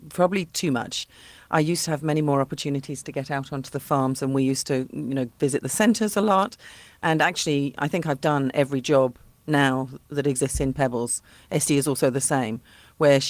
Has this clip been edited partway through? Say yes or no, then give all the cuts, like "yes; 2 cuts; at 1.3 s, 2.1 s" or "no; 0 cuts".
no; 0 cuts